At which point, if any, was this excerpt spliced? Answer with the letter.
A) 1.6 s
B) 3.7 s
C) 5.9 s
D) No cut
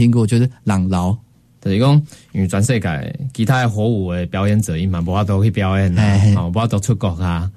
A